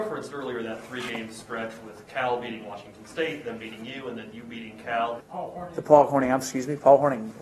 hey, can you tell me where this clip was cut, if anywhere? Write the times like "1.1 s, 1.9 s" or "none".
5.2 s